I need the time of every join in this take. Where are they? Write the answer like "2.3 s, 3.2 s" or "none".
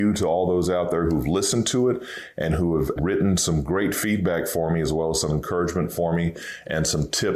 3.0 s